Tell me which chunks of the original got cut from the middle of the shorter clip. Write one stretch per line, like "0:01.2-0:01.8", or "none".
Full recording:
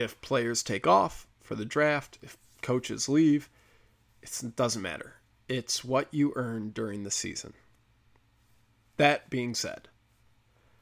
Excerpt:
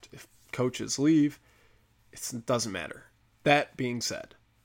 0:05.4-0:08.8